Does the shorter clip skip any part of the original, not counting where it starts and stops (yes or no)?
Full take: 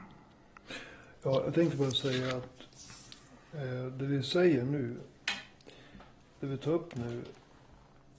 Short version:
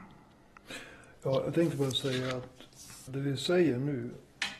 yes